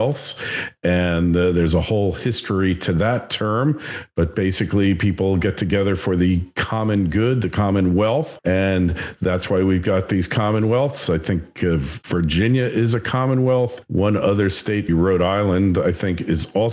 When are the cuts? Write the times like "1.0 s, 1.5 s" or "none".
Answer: 14.9 s